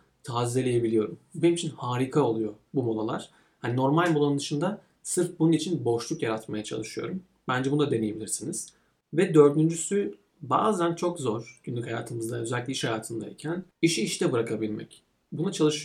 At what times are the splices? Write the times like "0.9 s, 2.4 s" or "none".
13.7 s